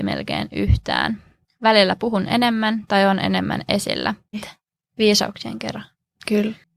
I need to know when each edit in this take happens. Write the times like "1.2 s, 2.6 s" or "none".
4.3 s